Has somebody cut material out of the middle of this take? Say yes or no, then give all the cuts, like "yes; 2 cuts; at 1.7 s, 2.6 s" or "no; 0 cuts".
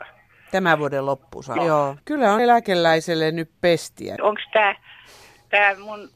yes; 2 cuts; at 1.6 s, 4.2 s